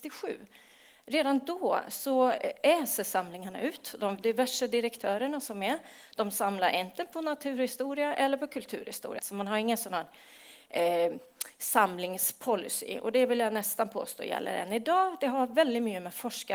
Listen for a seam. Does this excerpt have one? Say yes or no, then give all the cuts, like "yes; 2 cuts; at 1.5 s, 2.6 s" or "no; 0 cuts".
yes; 1 cut; at 9.2 s